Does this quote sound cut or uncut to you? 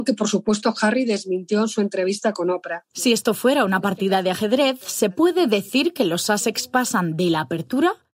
cut